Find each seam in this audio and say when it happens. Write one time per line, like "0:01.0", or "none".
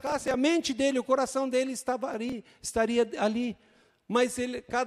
none